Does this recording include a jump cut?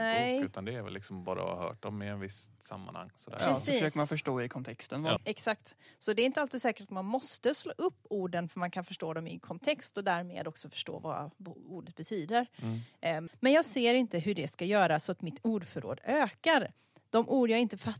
yes; 2 cuts; at 5.2 s, 13.3 s

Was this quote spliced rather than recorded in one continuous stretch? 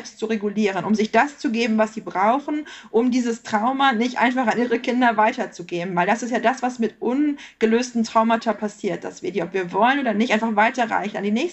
no; 0 cuts

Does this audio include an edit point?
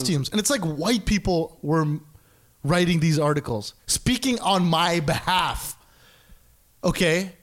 no; 0 cuts

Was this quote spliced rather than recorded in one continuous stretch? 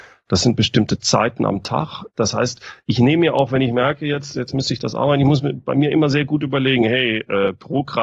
no; 0 cuts

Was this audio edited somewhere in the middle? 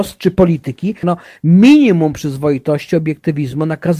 yes; 1 cut; at 1.0 s

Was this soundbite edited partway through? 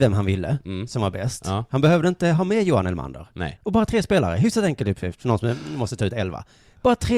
yes; 1 cut; at 3.6 s

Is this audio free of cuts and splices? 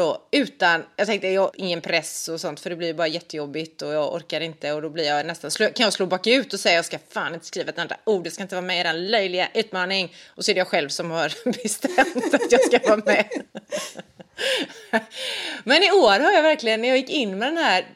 no; 1 cut; at 1.5 s

